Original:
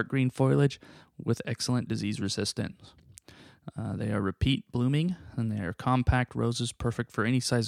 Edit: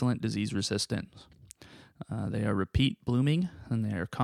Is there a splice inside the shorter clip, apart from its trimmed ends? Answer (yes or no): no